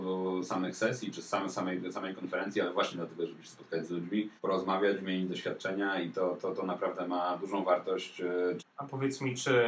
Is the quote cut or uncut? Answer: cut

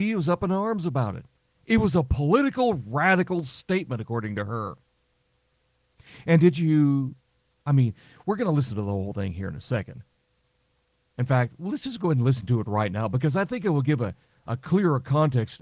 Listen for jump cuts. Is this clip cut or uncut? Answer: uncut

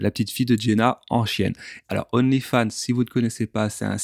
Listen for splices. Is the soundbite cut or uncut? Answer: cut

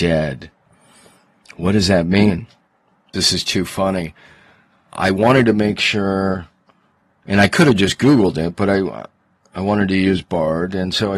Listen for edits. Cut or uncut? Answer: cut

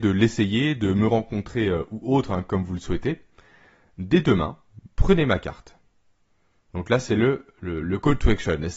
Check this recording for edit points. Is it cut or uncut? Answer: uncut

